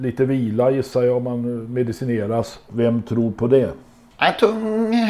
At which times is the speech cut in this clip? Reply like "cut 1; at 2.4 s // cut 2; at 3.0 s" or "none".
cut 1; at 2.7 s